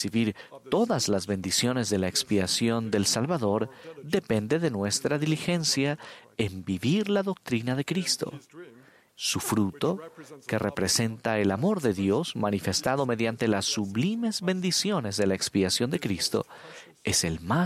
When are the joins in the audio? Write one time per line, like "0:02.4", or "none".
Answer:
0:09.1